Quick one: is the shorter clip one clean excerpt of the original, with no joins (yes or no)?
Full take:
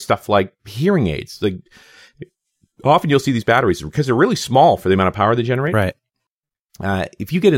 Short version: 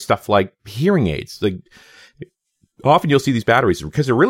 yes